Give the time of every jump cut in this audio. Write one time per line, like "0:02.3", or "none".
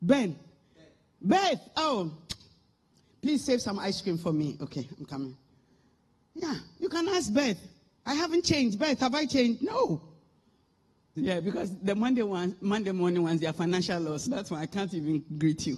0:11.2
0:14.3